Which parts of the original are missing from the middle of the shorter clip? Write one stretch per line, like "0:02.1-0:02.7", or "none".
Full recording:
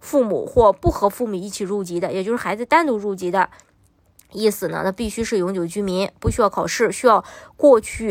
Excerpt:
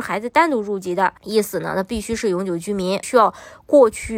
0:03.5-0:04.3
0:06.1-0:06.9